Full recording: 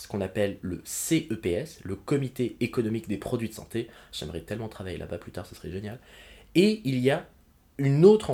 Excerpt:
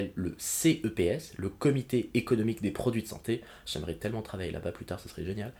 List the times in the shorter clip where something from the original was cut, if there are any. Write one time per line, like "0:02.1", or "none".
none